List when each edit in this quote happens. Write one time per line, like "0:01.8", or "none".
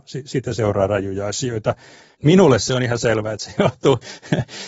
0:02.1